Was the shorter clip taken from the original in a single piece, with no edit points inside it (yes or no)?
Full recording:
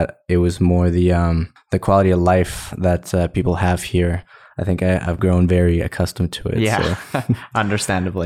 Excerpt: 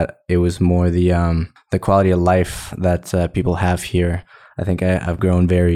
yes